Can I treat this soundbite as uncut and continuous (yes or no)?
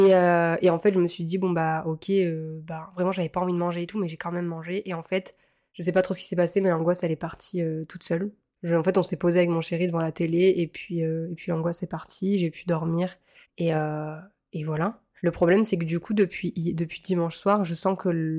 yes